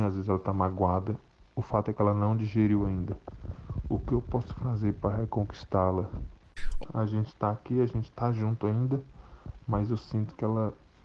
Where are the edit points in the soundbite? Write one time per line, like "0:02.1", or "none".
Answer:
0:06.8